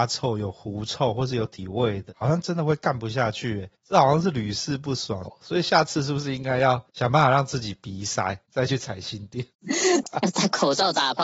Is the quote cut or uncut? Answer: cut